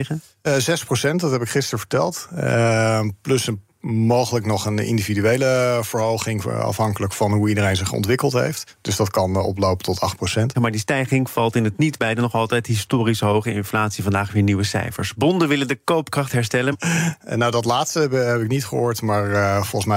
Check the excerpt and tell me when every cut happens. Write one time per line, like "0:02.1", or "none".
0:10.5
0:16.7